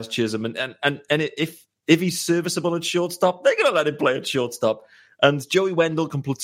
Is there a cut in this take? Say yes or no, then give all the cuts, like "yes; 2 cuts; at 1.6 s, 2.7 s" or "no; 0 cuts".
no; 0 cuts